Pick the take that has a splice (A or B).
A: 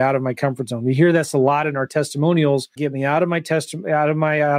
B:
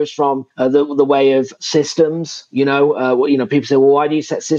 A